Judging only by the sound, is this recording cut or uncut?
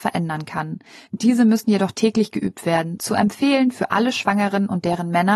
cut